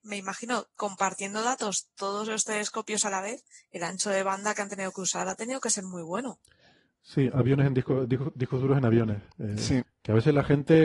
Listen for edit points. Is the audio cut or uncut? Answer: cut